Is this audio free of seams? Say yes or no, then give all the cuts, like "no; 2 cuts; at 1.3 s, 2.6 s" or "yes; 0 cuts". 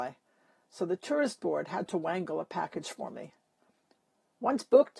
yes; 0 cuts